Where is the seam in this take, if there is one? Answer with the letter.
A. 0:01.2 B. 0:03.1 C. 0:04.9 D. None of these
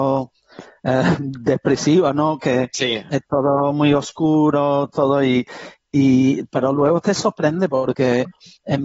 D